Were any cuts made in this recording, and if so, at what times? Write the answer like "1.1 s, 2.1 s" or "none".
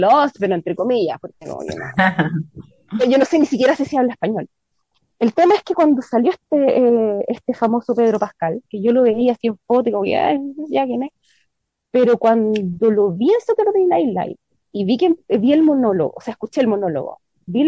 none